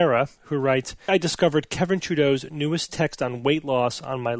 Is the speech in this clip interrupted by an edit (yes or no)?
yes